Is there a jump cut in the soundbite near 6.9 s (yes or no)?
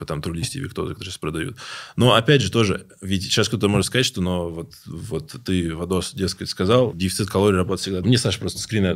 yes